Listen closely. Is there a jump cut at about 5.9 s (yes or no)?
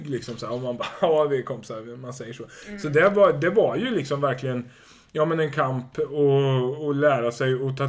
no